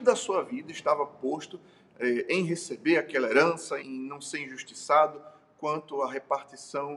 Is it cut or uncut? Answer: cut